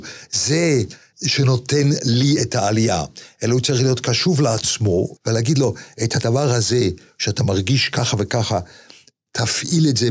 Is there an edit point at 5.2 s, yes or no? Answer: yes